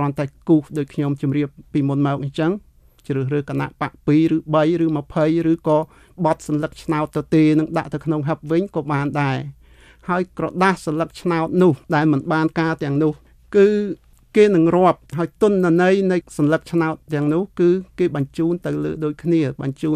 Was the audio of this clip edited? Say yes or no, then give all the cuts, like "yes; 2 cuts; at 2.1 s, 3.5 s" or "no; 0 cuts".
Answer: yes; 2 cuts; at 11.8 s, 15.1 s